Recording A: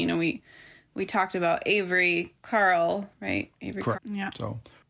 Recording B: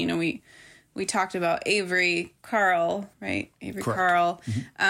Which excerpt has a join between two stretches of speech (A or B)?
A